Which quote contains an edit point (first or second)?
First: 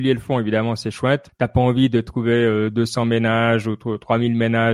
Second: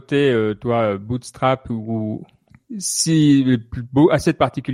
first